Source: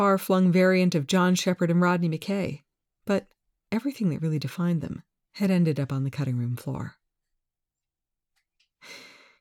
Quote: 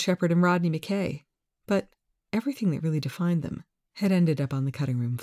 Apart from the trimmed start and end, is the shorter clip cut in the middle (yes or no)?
no